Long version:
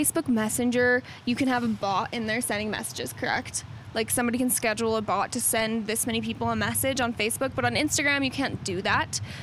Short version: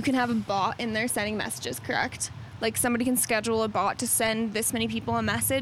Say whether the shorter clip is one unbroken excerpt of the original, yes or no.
yes